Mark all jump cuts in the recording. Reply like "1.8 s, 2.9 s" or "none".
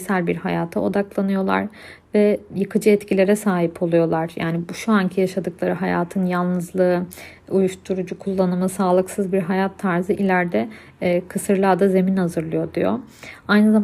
none